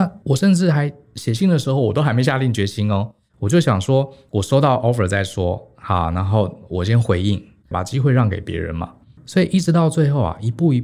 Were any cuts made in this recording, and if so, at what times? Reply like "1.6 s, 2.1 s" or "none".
7.7 s